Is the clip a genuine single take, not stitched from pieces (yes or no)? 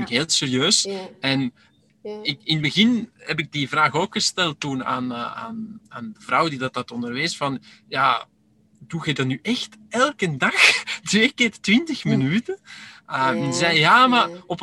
yes